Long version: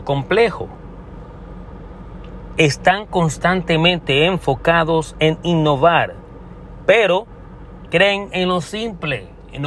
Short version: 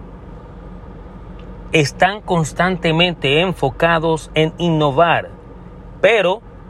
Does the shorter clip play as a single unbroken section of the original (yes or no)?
yes